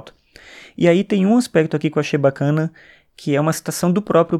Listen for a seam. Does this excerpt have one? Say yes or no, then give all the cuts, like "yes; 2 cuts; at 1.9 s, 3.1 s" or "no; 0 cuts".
no; 0 cuts